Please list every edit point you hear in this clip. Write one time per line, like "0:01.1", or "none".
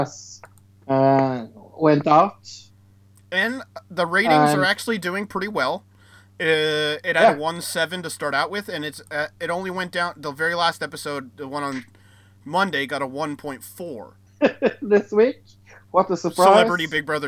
0:14.3